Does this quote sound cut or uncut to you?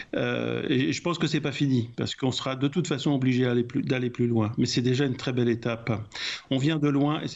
uncut